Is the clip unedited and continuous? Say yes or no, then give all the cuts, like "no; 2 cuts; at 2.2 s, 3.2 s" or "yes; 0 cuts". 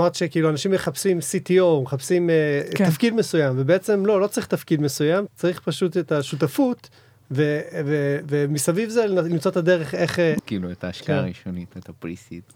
no; 2 cuts; at 5.3 s, 10.4 s